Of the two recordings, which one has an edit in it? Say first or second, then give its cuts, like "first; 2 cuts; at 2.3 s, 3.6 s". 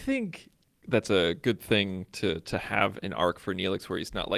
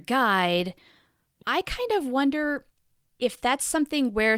second; 1 cut; at 1.4 s